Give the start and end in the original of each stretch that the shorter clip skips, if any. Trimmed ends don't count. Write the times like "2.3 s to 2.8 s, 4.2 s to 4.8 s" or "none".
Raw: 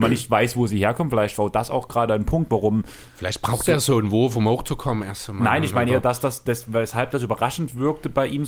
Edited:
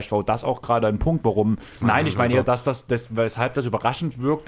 3.1 s to 5.4 s